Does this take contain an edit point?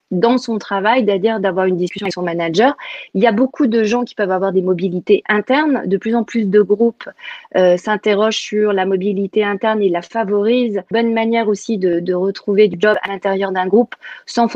no; 0 cuts

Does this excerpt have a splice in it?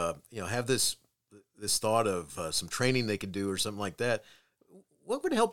no; 0 cuts

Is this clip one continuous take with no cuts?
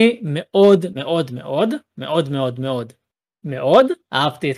no; 1 cut; at 0.9 s

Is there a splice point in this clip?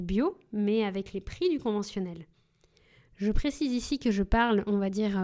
no; 0 cuts

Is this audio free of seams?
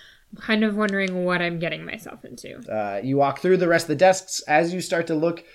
no; 1 cut; at 2.6 s

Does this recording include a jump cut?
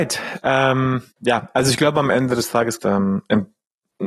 yes; 2 cuts; at 1.1 s, 2.8 s

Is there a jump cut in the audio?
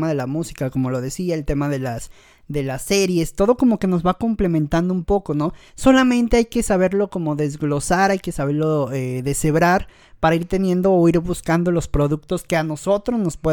no; 0 cuts

